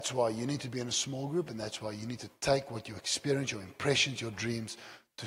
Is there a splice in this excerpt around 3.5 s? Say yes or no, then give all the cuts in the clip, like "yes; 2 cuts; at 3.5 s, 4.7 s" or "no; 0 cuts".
no; 0 cuts